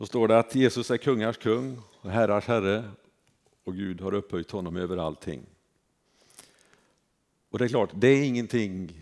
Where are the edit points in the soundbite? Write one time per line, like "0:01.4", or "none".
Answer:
none